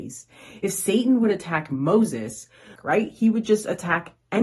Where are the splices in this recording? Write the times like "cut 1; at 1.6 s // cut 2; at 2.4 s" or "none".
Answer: cut 1; at 2.8 s